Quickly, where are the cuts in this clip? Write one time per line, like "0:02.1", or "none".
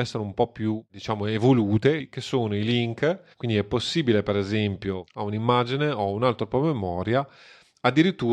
0:03.3
0:05.1

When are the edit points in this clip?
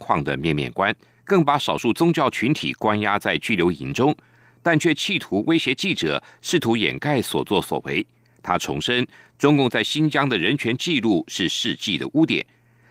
0:01.2

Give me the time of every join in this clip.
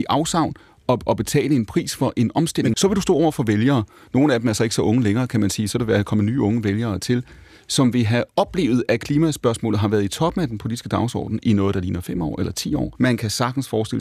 0:02.7
0:13.0

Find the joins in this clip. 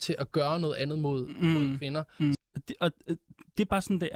0:02.3

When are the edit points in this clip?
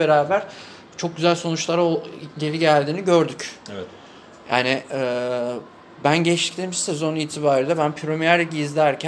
none

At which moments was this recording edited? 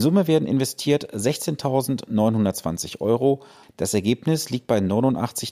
0:03.6

